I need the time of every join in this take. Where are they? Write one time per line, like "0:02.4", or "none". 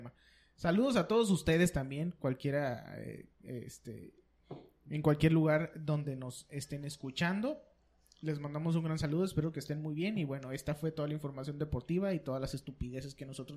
none